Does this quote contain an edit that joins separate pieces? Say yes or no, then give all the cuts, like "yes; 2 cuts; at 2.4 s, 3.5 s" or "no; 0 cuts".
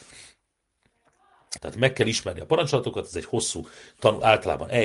yes; 1 cut; at 1.6 s